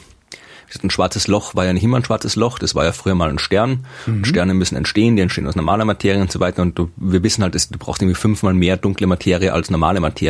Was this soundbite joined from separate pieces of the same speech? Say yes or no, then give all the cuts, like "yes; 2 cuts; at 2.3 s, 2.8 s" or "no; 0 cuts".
no; 0 cuts